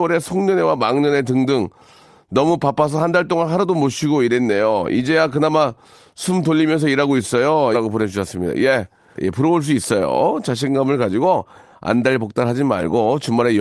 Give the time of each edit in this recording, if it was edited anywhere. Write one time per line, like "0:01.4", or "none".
0:07.7
0:09.2